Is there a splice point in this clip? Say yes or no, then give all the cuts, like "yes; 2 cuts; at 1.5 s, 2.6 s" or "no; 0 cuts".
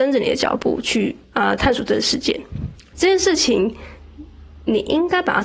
yes; 2 cuts; at 1.2 s, 2.9 s